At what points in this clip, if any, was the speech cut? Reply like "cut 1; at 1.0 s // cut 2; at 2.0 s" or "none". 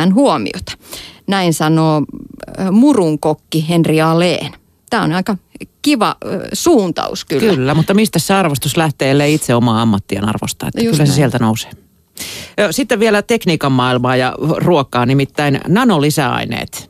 none

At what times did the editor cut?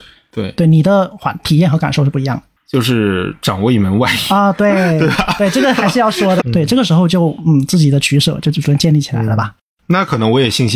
cut 1; at 2.6 s // cut 2; at 6.4 s

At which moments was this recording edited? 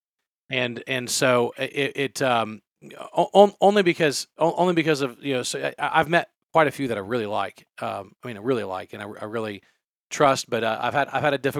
none

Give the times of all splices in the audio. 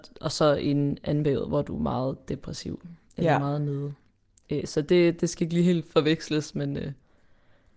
none

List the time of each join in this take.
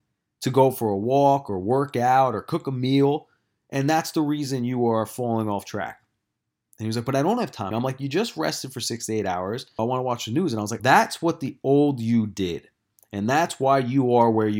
cut 1; at 7.7 s // cut 2; at 9.8 s // cut 3; at 10.8 s

